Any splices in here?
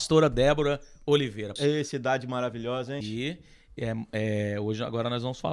yes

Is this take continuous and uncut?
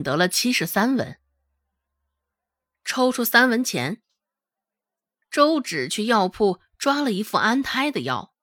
yes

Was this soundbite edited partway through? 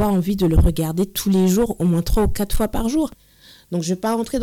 no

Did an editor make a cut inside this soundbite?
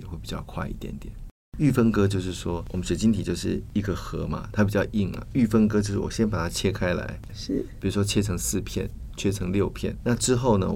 yes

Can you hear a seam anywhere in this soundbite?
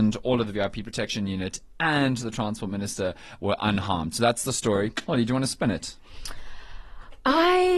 no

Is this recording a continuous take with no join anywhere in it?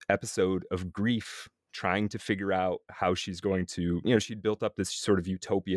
yes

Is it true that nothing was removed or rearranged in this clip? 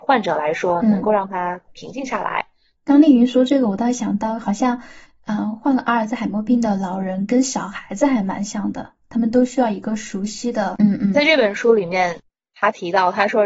no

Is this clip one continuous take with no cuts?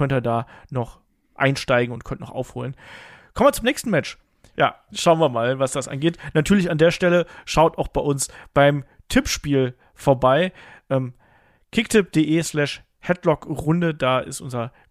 no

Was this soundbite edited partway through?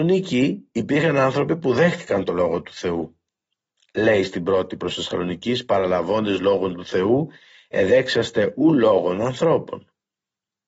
no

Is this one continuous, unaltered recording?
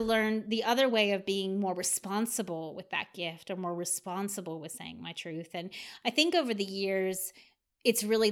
yes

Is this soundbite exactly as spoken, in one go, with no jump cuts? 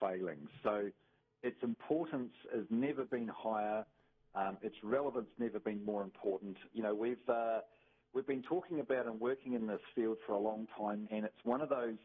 no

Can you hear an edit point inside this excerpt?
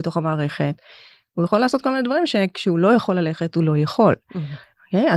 no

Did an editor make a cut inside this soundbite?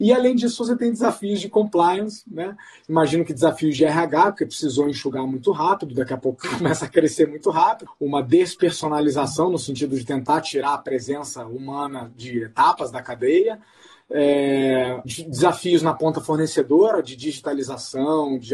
yes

